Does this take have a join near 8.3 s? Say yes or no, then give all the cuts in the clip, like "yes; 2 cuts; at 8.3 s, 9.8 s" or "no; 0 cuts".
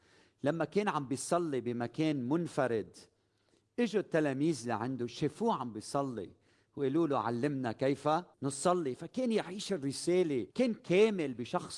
yes; 2 cuts; at 8.3 s, 10.5 s